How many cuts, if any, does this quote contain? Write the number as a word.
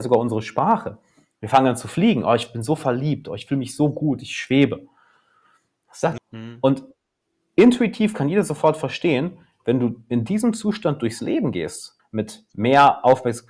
two